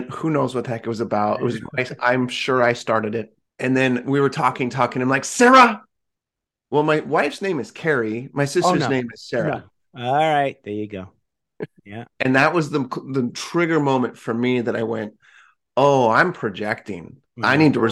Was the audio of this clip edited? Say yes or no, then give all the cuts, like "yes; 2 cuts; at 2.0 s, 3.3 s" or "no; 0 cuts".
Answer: yes; 2 cuts; at 3.5 s, 4.7 s